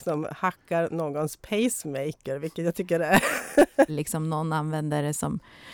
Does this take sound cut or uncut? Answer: cut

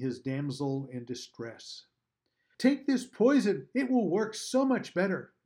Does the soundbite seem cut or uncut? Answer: cut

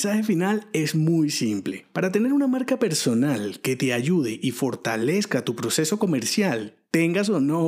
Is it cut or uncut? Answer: uncut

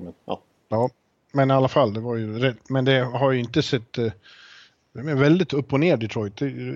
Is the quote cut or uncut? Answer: uncut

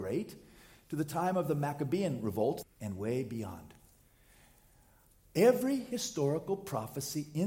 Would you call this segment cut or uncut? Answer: cut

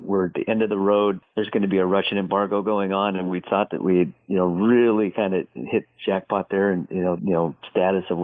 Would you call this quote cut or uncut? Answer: cut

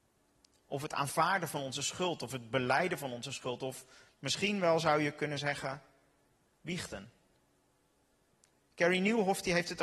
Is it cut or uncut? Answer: uncut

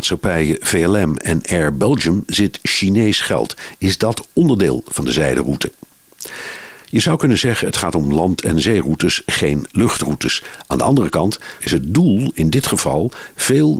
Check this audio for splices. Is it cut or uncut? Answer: cut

